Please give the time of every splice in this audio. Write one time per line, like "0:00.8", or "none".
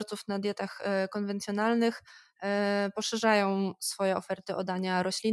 none

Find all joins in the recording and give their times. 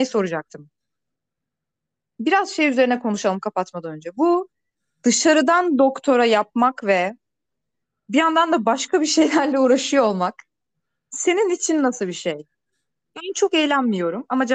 none

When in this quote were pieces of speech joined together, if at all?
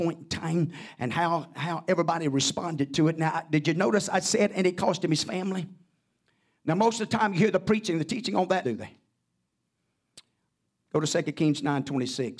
0:08.6

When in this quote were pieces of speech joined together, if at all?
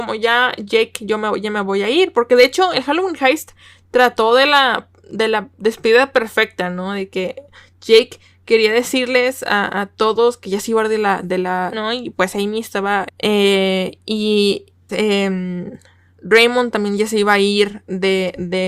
0:11.7
0:13.1
0:14.9

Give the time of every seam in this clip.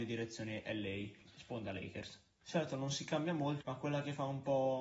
0:02.4
0:03.6

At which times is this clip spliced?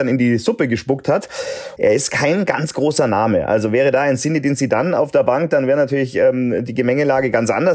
0:01.8

